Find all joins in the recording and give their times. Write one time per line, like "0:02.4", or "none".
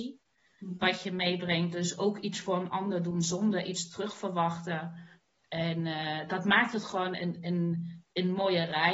none

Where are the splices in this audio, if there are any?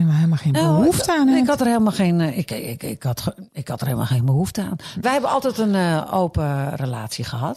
0:05.0

